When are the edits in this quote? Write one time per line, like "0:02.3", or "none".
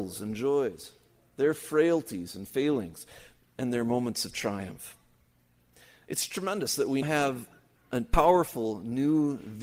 0:03.4
0:07.0